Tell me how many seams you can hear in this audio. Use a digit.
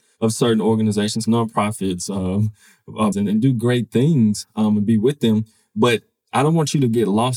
2